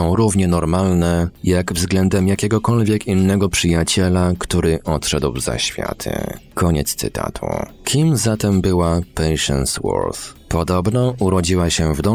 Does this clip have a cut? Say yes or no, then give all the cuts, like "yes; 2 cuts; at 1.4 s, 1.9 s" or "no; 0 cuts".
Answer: no; 0 cuts